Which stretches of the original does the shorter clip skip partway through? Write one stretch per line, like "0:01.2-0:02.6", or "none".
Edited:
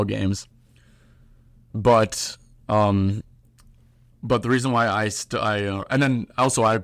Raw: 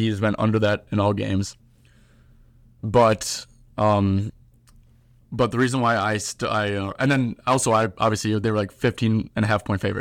none